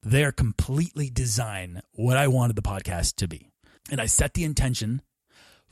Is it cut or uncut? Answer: cut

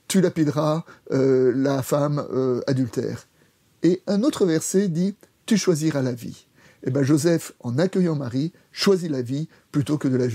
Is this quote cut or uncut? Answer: uncut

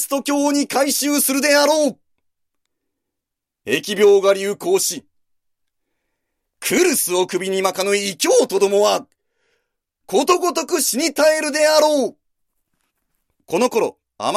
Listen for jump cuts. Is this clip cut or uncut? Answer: uncut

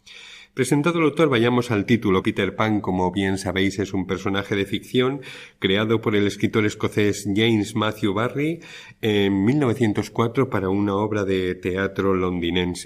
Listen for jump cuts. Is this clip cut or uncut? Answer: cut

